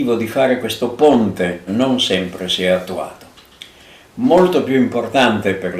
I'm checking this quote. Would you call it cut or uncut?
cut